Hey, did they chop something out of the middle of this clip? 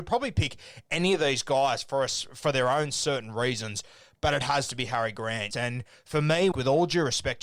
yes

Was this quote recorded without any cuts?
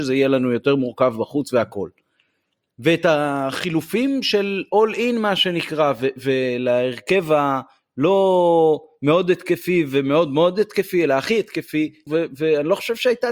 no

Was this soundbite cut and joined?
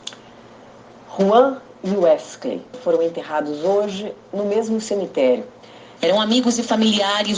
yes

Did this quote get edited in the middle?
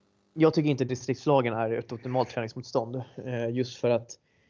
no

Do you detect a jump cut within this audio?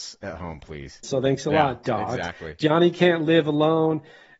yes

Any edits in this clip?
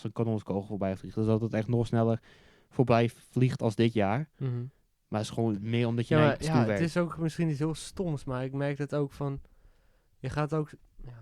no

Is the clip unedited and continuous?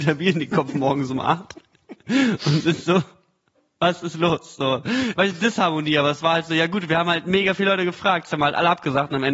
no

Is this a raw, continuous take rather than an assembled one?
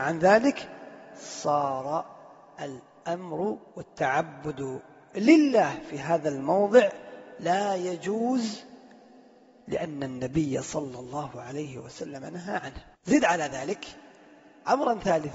no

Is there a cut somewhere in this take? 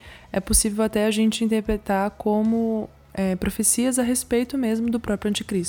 no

